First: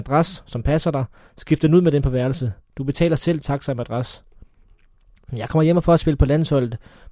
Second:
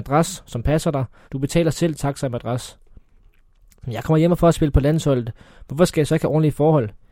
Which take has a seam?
second; 1 cut; at 1.3 s

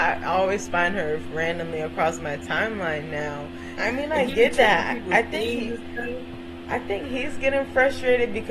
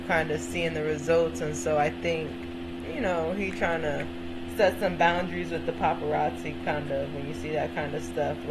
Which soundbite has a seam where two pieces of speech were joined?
first; 1 cut; at 3.8 s

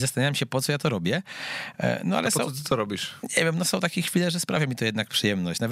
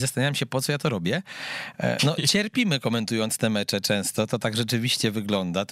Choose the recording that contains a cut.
second; 1 cut; at 2.0 s

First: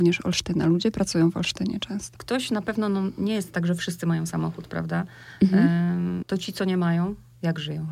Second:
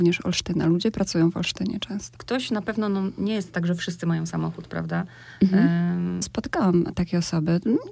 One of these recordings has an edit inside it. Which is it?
second; 1 cut; at 6.2 s

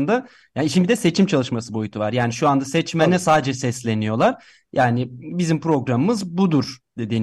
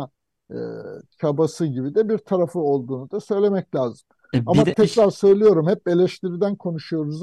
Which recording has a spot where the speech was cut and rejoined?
second; 1 cut; at 4.7 s

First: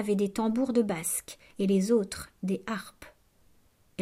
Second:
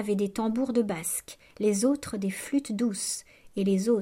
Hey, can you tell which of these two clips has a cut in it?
first; 1 cut; at 1.5 s

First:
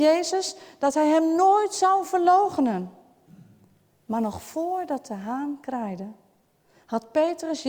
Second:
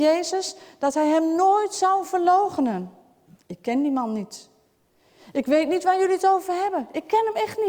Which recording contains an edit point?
second; 1 cut; at 3.3 s

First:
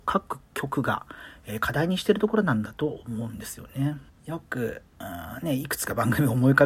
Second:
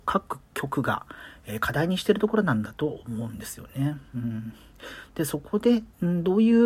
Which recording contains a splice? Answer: first; 1 cut; at 4.1 s

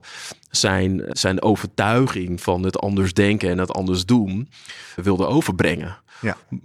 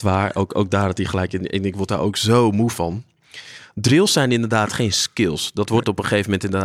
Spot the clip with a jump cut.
first; 2 cuts; at 1.1 s, 5.0 s

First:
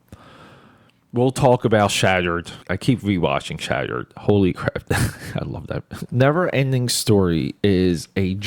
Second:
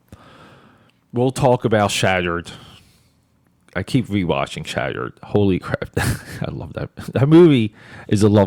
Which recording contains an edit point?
first; 2 cuts; at 2.6 s, 6.1 s

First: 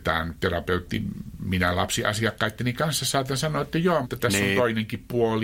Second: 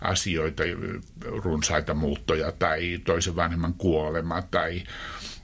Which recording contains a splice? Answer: first; 1 cut; at 4.0 s

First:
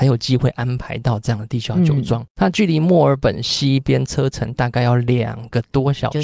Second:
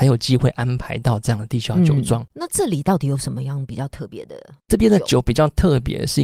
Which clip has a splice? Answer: second; 1 cut; at 2.3 s

